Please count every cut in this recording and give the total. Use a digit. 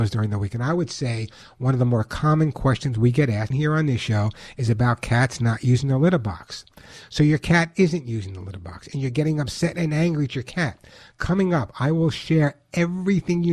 1